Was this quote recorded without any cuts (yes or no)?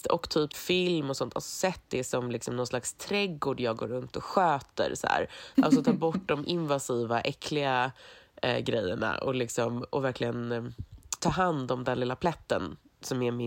no